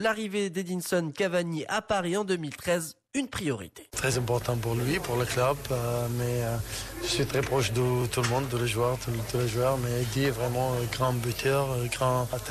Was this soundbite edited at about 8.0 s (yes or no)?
no